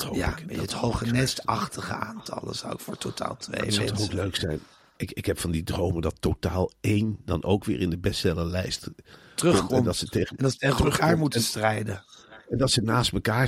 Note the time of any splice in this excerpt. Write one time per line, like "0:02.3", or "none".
none